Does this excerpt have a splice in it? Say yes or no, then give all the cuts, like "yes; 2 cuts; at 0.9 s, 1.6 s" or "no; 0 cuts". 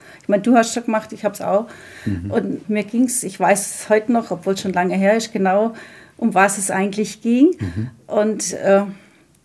yes; 1 cut; at 2.6 s